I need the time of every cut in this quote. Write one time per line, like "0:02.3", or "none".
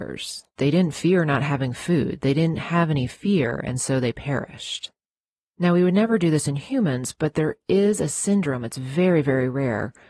none